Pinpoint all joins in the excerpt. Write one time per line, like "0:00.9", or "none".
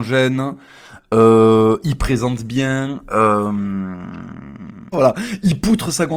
0:04.9